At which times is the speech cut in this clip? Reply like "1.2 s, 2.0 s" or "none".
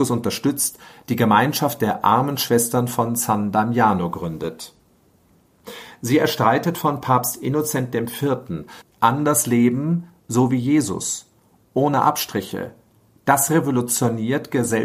8.8 s